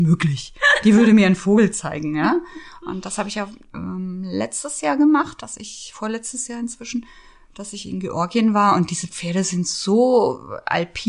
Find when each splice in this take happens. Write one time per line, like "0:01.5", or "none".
none